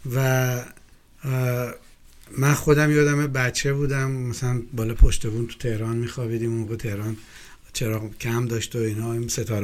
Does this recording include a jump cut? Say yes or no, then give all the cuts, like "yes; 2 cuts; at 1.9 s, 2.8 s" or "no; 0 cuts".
no; 0 cuts